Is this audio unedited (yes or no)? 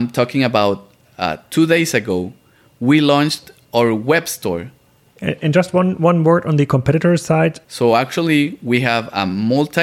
no